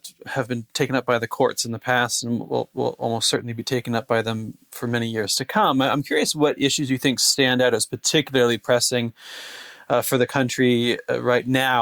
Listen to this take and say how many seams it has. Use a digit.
0